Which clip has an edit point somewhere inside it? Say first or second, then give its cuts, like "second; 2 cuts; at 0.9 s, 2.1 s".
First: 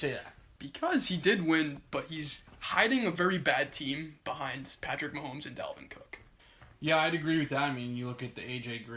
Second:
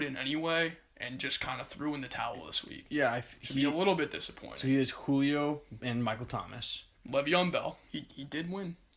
second; 2 cuts; at 5.8 s, 7.9 s